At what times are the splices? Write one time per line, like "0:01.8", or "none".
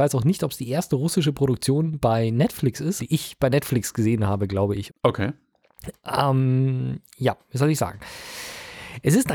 0:03.0
0:04.9